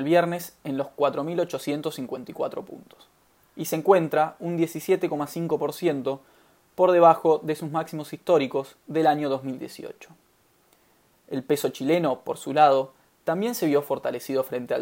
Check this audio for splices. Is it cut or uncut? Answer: uncut